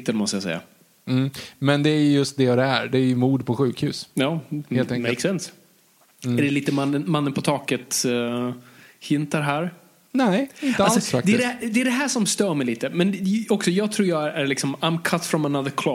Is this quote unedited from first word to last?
yes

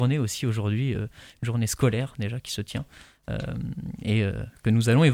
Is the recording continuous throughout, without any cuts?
yes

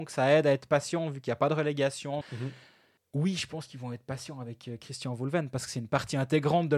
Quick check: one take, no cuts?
no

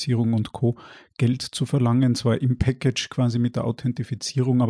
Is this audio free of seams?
yes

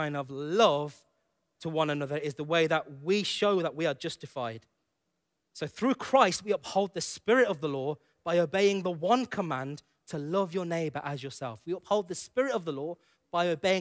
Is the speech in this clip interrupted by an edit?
no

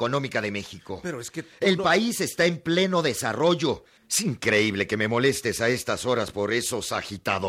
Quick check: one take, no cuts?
no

